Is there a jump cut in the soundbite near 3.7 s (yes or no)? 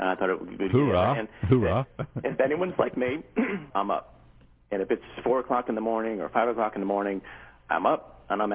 yes